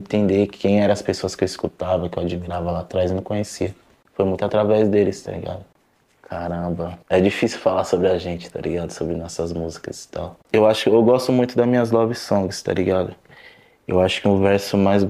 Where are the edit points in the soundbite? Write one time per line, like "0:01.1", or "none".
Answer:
0:07.0